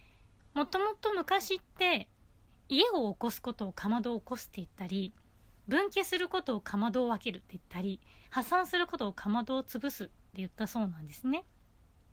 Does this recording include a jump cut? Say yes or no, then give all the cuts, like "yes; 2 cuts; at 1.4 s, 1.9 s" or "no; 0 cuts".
yes; 1 cut; at 2.5 s